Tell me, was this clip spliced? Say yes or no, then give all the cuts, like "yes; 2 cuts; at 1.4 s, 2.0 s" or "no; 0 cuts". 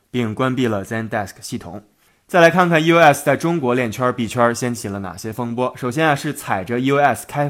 no; 0 cuts